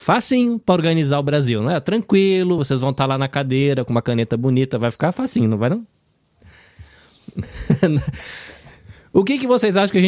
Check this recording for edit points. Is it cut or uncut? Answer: uncut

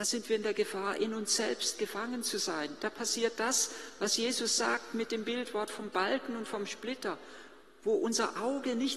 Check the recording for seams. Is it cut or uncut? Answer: uncut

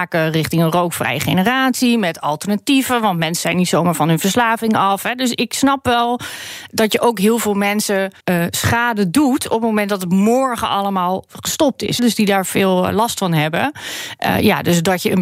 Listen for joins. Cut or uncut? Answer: cut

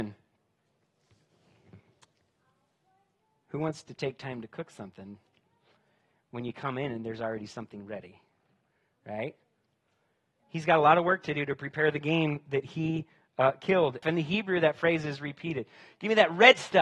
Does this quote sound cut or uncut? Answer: cut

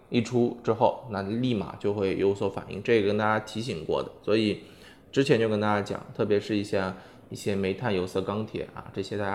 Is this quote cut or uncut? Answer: uncut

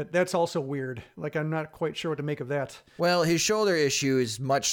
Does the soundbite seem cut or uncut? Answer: uncut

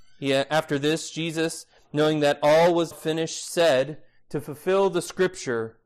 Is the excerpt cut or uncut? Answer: cut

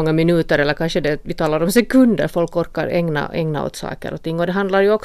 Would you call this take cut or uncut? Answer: uncut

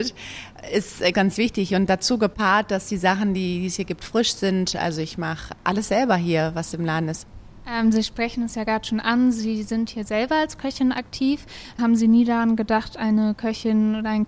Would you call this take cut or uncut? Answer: cut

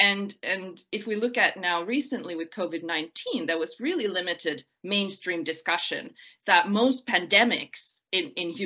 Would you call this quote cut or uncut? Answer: uncut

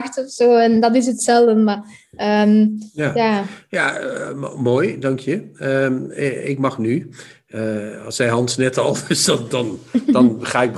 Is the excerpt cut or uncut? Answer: uncut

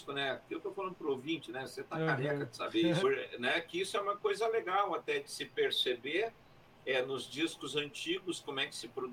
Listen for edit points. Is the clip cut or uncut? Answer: cut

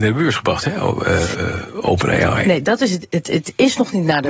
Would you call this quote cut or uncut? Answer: cut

